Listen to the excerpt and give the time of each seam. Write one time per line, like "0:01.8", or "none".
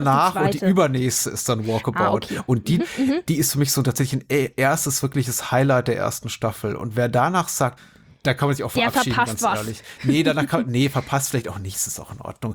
0:02.8
0:07.8

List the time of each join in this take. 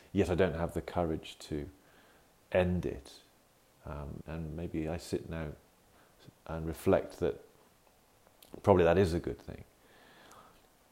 0:04.2
0:06.4

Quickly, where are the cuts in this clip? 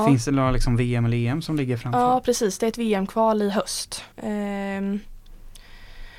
0:04.1

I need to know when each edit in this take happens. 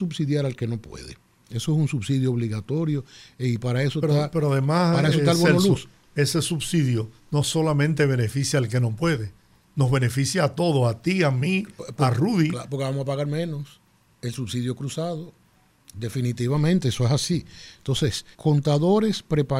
0:07.2
0:18.3

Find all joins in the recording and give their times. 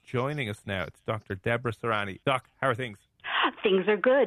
0:02.2

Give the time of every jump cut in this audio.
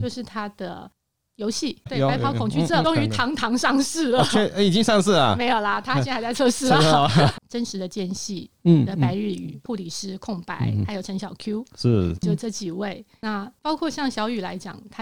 0:07.3
0:12.1

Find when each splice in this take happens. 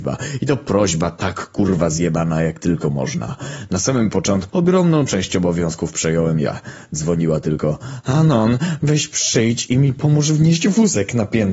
0:04.5

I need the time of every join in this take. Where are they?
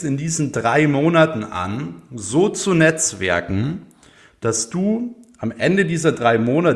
none

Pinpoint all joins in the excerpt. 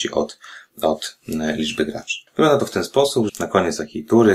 0:02.3
0:03.3

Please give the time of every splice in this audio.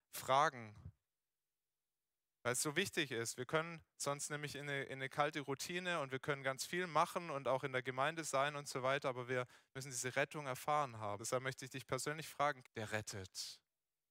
0:11.2
0:12.6

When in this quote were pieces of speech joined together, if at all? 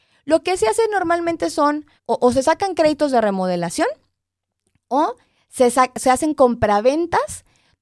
0:02.0

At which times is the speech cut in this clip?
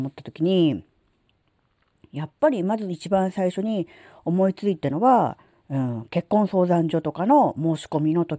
none

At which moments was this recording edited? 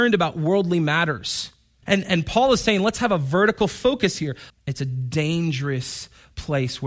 0:01.8
0:04.5

